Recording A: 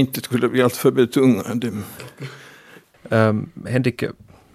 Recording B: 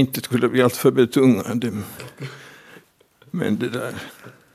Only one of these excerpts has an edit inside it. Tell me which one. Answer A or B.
A